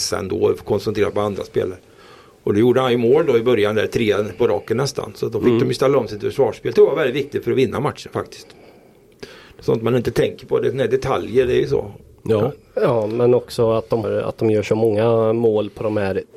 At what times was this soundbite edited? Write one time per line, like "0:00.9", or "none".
0:14.0

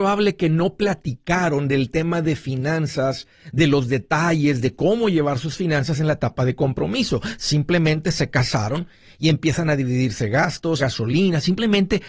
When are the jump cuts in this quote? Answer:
0:10.8

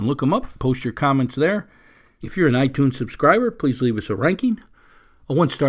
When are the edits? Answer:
0:02.2

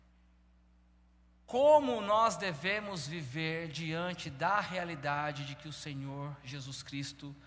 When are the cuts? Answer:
none

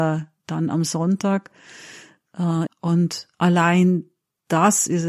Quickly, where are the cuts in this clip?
0:02.7

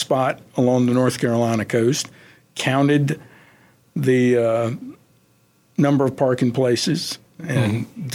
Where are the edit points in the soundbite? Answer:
none

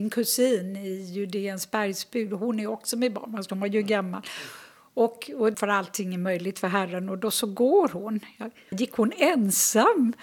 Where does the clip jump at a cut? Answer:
0:05.5
0:08.7

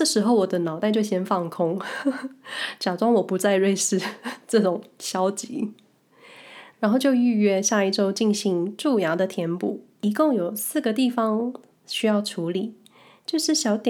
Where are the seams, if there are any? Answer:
0:06.7

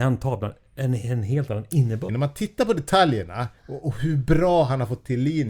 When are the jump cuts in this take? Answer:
0:02.1
0:03.6

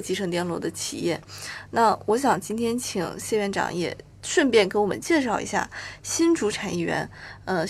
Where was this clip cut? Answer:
none

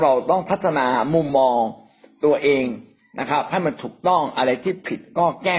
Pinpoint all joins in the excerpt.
0:01.3

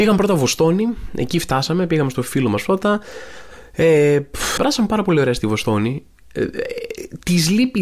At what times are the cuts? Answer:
0:04.6

